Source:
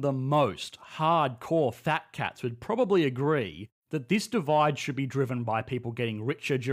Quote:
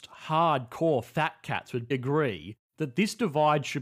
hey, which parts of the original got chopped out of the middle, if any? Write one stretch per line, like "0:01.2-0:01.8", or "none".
0:02.6-0:03.0